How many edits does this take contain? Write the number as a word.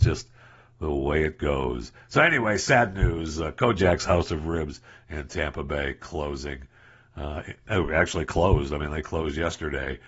zero